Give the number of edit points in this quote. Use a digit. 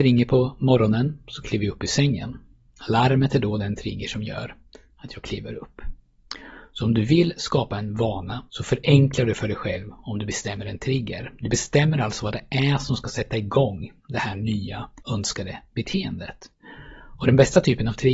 2